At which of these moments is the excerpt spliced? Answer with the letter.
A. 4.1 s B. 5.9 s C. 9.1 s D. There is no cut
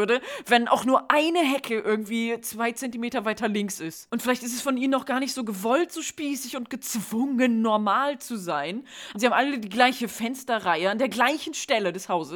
C